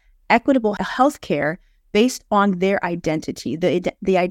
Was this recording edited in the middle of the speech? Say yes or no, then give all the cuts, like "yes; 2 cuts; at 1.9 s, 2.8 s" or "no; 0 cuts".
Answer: no; 0 cuts